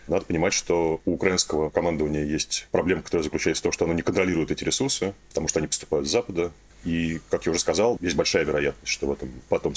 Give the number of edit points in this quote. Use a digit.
2